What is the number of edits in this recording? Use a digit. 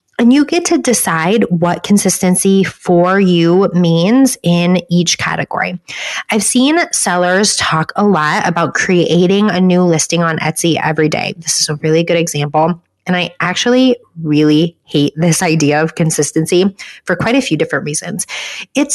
0